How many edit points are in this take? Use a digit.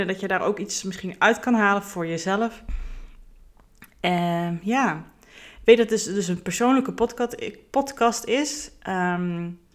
0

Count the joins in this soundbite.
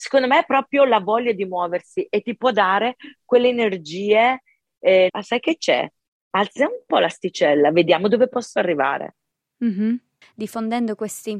2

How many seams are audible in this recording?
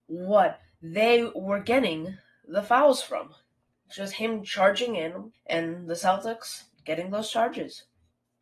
2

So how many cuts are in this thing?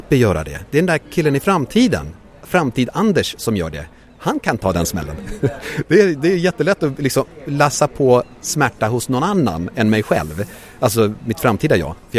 0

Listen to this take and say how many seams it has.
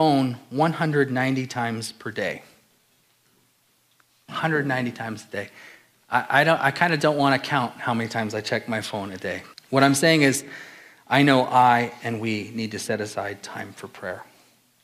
1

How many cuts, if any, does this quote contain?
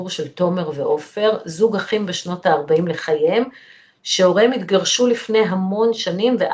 0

